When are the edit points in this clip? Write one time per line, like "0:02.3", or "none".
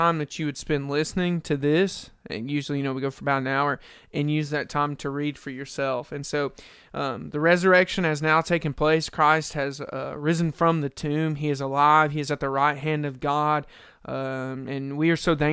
none